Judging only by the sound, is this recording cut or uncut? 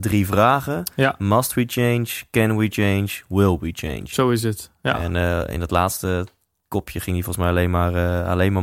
uncut